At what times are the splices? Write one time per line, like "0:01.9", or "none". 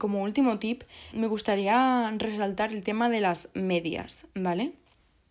0:01.1